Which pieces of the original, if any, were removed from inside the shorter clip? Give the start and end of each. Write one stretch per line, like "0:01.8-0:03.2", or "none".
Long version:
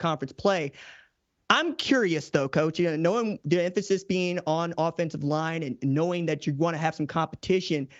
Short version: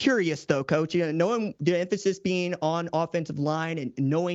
none

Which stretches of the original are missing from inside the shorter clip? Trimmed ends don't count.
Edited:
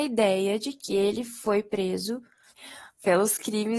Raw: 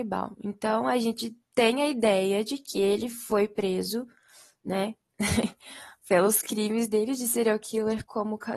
0:04.3-0:05.5

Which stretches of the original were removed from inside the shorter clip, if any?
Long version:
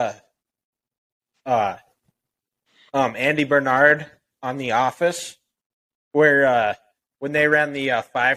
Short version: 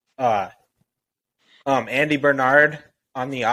none

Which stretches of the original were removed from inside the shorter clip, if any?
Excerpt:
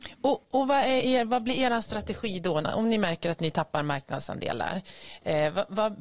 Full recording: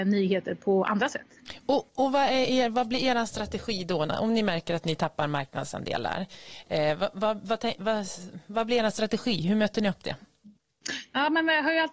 none

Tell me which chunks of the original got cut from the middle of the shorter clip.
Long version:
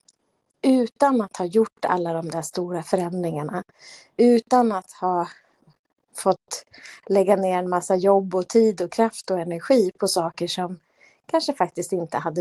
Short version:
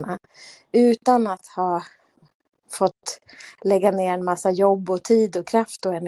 none

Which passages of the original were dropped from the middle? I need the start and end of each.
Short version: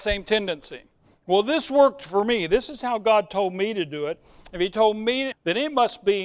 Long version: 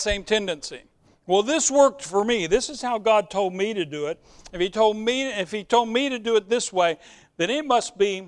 0:05.3-0:07.2

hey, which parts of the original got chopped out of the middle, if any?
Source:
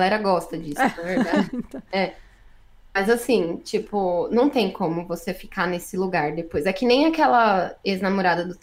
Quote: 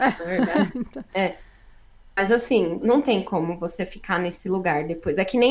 0:03.6-0:04.3

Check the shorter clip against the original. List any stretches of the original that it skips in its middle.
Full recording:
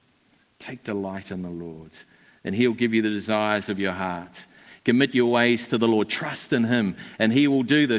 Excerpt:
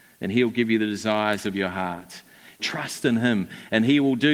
0:04.8-0:06.1

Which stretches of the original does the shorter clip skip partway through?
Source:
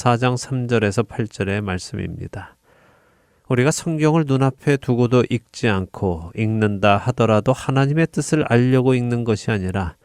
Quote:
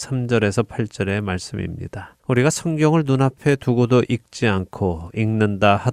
0:02.6-0:03.4

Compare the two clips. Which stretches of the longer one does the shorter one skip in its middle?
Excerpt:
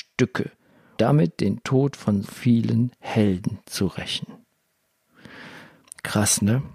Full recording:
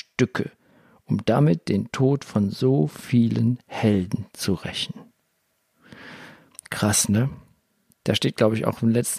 0:01.0-0:01.2
0:02.5-0:02.9

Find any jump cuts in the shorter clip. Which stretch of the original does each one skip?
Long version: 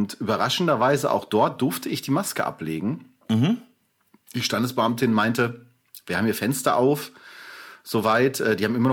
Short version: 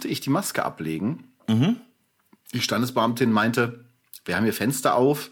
none

